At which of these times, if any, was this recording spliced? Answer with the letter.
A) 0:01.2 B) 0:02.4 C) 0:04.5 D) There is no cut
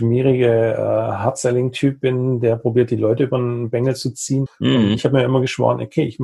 C